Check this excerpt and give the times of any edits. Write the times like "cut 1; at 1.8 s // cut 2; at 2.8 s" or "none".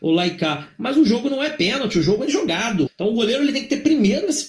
cut 1; at 2.9 s